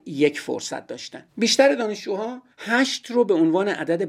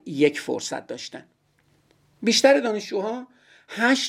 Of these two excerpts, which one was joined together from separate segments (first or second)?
first